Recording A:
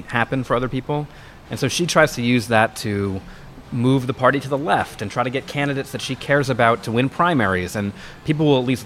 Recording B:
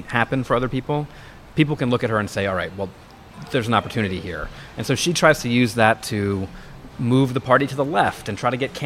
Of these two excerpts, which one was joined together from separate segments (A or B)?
A